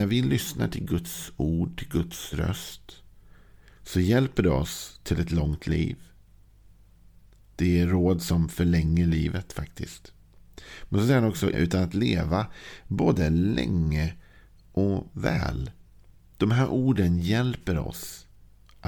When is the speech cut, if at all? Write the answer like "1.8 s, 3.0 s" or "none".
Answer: 11.5 s